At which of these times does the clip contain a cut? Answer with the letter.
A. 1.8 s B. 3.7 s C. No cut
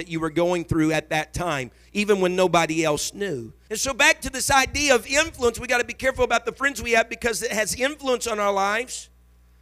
B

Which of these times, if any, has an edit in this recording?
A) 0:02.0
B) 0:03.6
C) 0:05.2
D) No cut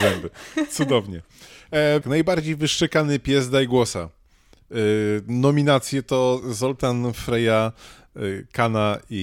A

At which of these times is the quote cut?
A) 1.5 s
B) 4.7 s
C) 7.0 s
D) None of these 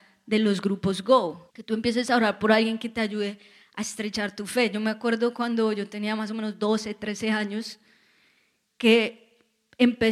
A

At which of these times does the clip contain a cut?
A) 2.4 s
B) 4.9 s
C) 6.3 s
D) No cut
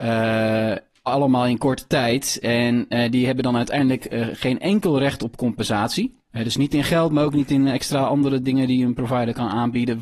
C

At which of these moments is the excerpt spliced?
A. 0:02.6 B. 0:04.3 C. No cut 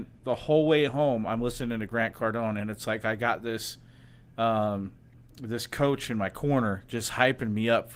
C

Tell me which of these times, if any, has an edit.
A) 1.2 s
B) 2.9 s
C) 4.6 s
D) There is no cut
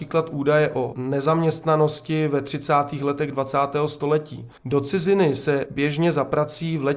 C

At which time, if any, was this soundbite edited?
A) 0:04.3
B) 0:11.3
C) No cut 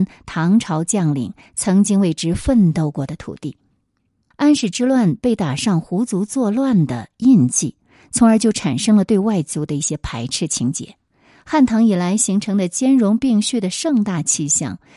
A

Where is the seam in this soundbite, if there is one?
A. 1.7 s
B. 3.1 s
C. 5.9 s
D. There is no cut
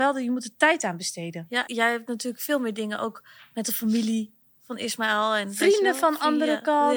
A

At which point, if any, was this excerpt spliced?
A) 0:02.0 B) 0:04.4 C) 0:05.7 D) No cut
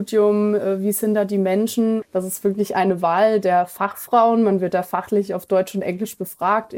A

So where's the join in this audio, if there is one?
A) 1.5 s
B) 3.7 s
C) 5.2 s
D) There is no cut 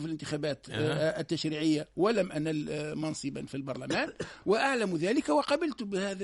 D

